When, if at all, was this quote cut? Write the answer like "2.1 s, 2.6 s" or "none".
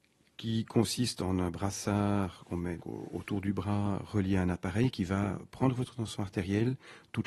2.8 s